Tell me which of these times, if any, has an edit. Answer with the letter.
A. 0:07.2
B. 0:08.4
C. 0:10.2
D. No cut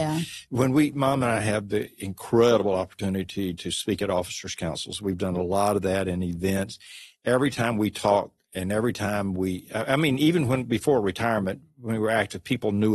D